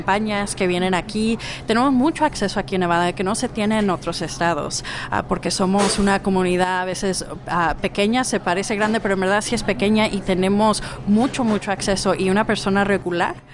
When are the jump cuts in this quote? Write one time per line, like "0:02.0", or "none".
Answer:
none